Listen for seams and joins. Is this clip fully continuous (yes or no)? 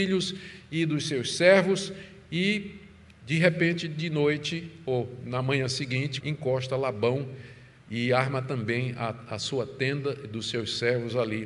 no